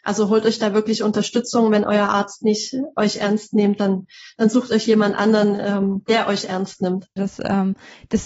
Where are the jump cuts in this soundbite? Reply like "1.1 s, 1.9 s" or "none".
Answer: 7.2 s